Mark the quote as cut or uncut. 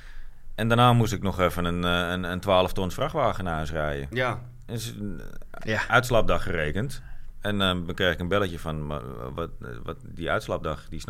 uncut